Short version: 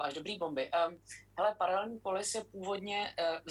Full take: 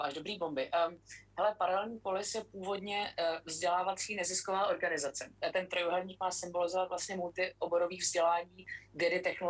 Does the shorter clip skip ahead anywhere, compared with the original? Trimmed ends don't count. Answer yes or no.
no